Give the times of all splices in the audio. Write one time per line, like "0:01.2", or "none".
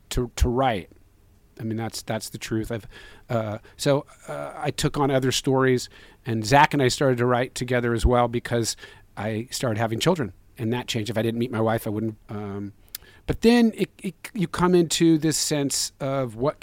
0:10.5
0:12.2